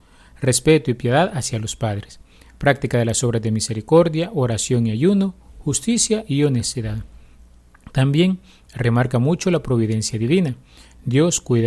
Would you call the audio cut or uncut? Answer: uncut